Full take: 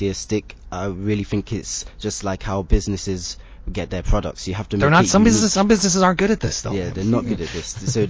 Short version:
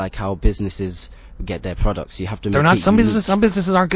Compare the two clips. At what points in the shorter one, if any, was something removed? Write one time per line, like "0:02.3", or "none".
none